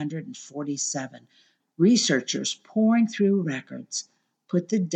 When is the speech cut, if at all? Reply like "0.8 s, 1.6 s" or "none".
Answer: 1.6 s